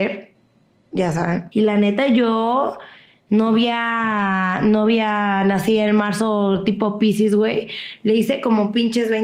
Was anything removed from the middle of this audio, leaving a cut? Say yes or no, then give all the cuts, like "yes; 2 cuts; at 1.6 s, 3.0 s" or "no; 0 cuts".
yes; 1 cut; at 1.5 s